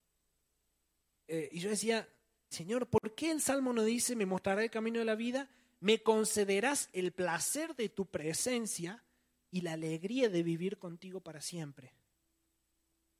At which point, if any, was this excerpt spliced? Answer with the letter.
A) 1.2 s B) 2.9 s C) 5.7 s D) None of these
D